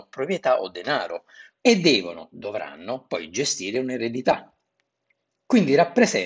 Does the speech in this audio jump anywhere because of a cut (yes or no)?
yes